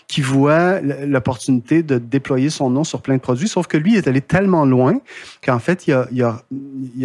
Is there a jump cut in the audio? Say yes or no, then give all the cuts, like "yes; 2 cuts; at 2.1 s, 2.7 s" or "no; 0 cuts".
no; 0 cuts